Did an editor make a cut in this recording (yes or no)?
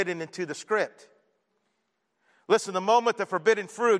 no